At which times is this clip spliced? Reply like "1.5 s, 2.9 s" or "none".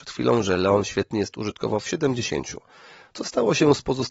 none